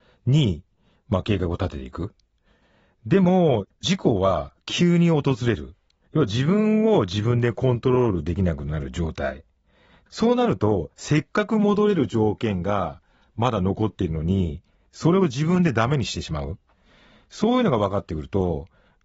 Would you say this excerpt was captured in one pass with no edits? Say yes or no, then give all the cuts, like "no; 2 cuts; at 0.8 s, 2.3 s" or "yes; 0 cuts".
no; 1 cut; at 6.1 s